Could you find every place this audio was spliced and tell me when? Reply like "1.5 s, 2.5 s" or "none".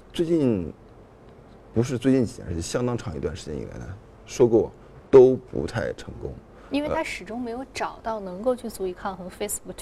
none

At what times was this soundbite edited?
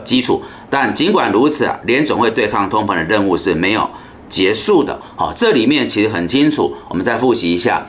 none

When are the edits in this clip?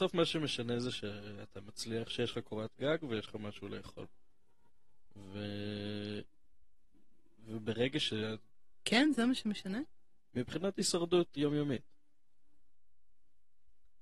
11.4 s

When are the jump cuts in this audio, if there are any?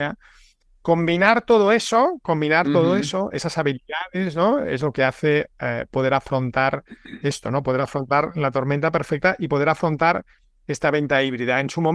none

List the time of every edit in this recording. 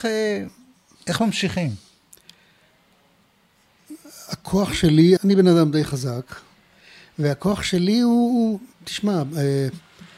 5.2 s

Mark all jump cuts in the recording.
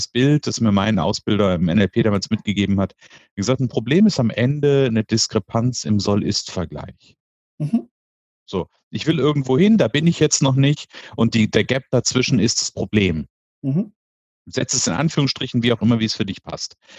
none

